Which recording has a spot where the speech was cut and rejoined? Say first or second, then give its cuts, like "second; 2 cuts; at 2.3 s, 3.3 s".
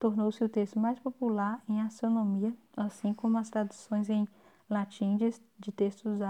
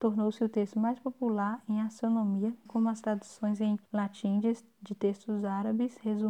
second; 2 cuts; at 2.7 s, 3.9 s